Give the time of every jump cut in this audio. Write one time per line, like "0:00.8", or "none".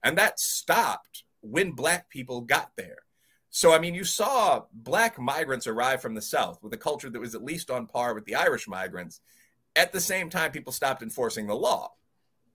none